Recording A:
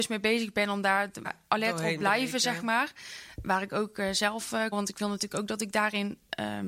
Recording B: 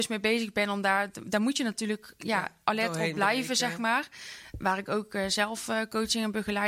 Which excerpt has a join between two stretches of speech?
A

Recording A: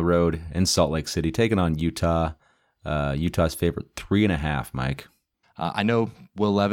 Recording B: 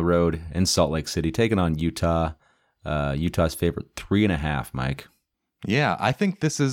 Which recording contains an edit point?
A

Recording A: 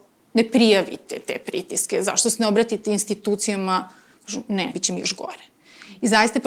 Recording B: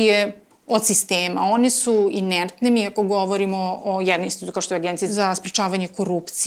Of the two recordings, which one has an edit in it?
A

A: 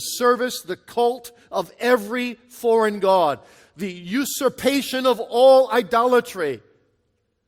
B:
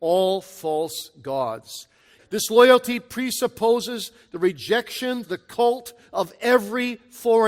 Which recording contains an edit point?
B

